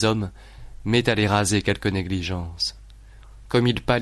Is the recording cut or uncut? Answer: uncut